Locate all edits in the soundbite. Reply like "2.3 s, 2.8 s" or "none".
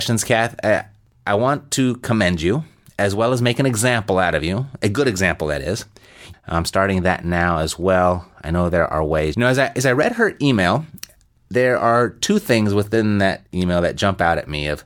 6.3 s, 9.3 s